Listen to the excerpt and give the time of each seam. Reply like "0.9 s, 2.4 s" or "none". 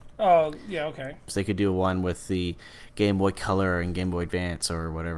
1.3 s